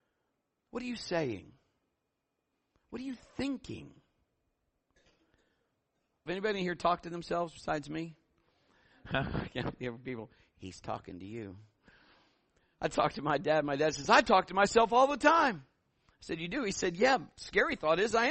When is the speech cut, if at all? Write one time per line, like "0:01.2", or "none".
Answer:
0:06.3